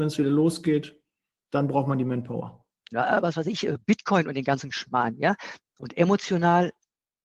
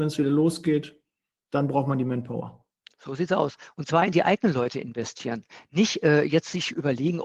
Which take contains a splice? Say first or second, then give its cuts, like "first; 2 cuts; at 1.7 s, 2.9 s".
first; 2 cuts; at 2.9 s, 5.6 s